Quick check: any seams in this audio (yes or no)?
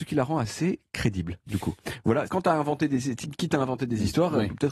yes